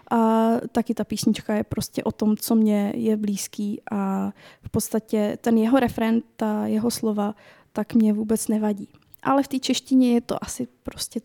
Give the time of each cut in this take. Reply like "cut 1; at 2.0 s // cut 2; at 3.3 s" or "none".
none